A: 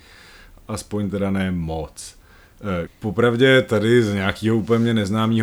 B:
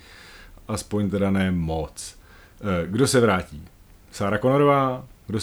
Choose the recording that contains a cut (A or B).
A